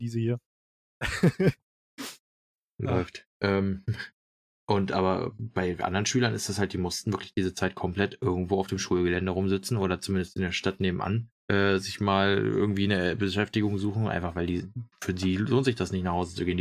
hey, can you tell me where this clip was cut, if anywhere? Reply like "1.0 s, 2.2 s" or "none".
3.3 s, 11.4 s, 14.9 s